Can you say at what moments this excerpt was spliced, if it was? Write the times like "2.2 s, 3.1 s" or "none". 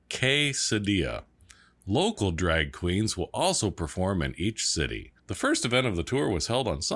5.2 s